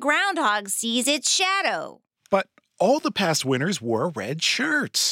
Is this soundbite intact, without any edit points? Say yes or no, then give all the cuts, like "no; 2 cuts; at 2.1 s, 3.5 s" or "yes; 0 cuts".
yes; 0 cuts